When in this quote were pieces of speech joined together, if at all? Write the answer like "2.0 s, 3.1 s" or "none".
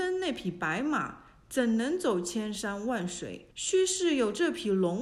3.5 s